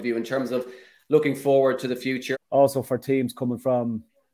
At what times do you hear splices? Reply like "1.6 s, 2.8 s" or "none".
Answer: 2.3 s